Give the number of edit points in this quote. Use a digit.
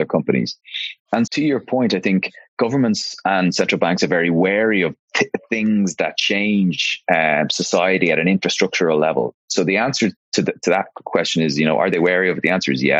1